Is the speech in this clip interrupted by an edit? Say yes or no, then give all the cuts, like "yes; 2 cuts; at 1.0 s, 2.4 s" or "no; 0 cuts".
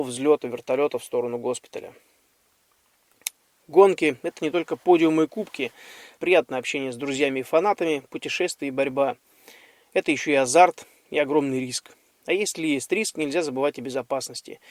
yes; 1 cut; at 6.2 s